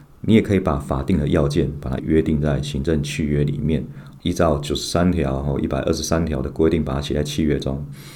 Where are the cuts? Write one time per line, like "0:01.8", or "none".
0:02.0
0:04.2